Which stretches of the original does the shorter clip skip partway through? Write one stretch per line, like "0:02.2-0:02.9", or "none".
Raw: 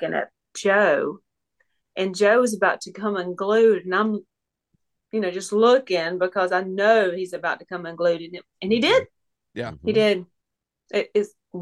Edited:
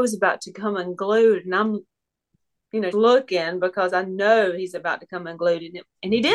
0:05.3-0:05.5